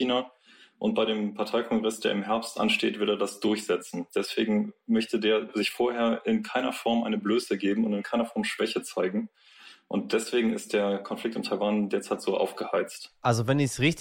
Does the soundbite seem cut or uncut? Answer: uncut